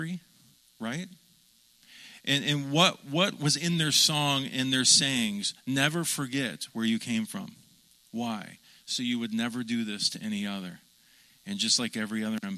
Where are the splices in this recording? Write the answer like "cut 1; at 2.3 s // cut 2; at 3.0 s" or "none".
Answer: none